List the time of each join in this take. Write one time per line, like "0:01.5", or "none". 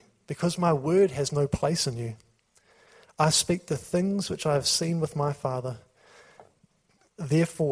none